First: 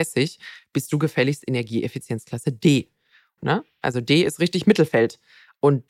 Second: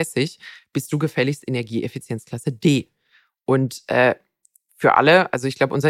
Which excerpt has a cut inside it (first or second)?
first